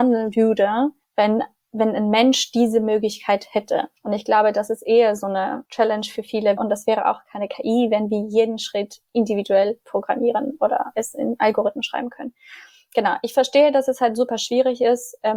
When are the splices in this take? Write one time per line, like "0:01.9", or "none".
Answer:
0:04.0
0:06.6